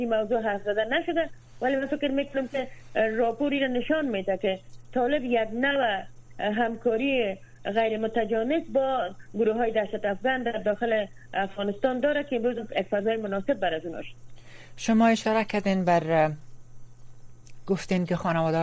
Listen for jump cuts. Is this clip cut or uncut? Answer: cut